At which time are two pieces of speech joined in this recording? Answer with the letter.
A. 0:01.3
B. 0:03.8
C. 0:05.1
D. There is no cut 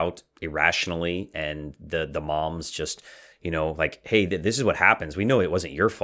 D